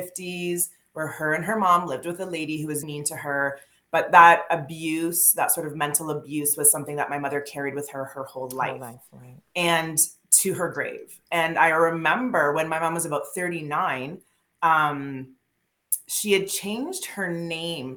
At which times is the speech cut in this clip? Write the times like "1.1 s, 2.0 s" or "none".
2.8 s

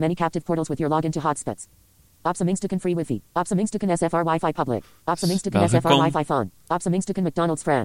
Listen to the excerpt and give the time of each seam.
2.2 s, 3.3 s

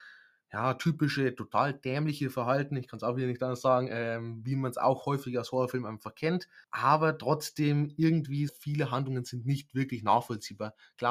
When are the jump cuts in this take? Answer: 6.6 s, 8.5 s

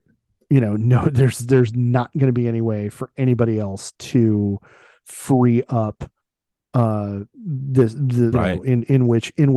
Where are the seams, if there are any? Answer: 8.3 s

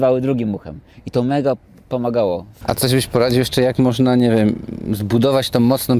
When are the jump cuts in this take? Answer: 2.6 s

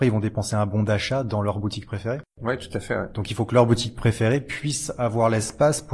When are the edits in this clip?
none

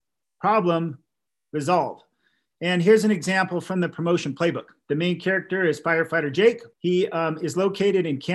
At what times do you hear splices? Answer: 6.7 s

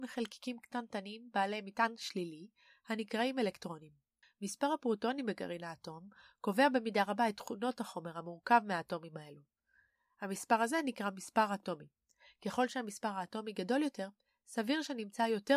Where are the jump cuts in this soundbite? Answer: none

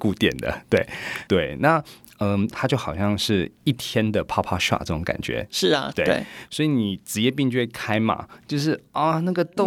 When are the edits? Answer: 1.3 s, 2.5 s, 5.9 s

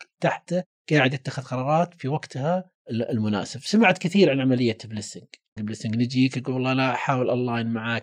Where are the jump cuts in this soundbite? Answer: 5.6 s

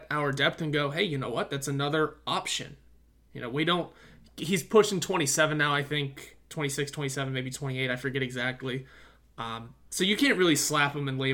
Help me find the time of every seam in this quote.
none

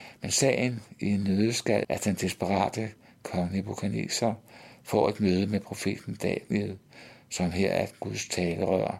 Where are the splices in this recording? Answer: 1.8 s

